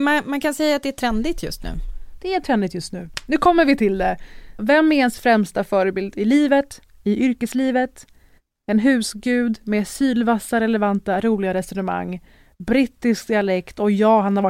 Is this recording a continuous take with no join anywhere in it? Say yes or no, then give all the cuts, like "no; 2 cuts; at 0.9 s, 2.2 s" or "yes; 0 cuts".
no; 1 cut; at 4.6 s